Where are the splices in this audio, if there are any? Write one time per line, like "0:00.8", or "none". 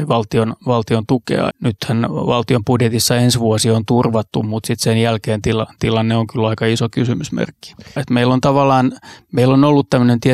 0:01.5
0:08.0